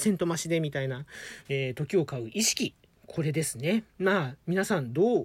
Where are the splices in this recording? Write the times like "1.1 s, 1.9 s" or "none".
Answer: 1.4 s, 3.9 s

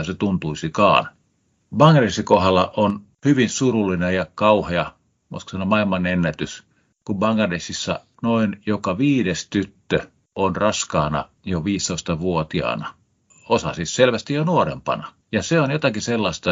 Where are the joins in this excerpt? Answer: 15.2 s

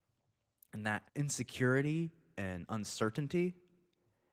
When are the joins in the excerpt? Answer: 1.1 s

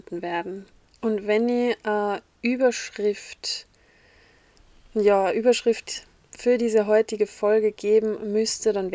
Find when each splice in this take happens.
none

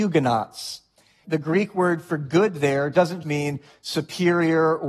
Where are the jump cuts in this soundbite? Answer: 1.2 s, 3.2 s

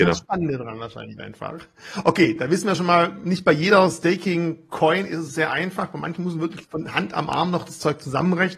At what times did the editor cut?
none

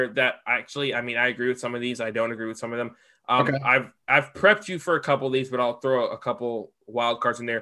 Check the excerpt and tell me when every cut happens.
none

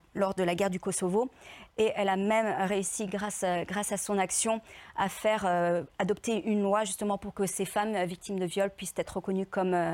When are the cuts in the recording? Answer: none

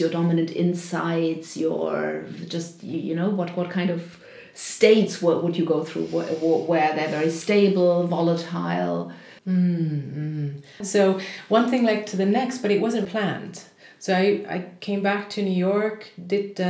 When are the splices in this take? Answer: 9.4 s, 10.8 s, 13.1 s

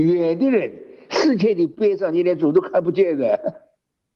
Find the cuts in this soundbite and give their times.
none

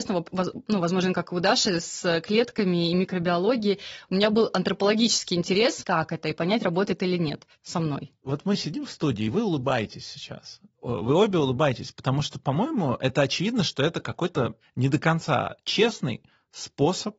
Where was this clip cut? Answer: 5.8 s

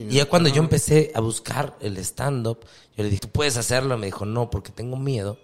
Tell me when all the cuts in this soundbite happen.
3.2 s

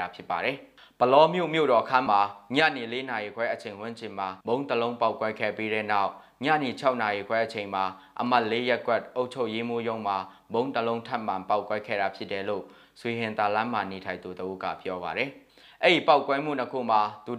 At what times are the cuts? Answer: 2.1 s, 4.4 s

